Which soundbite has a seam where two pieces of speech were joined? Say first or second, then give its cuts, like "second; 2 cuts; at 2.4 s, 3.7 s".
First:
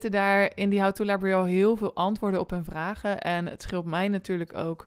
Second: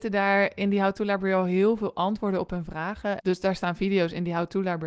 second; 1 cut; at 3.2 s